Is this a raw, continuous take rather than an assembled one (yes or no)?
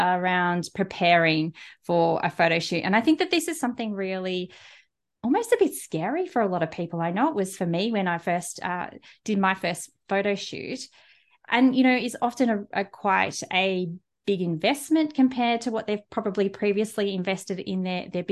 yes